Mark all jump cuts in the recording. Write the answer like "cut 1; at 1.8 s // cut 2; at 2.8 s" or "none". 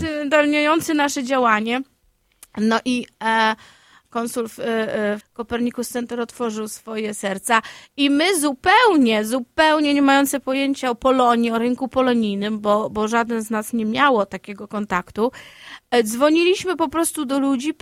cut 1; at 5.2 s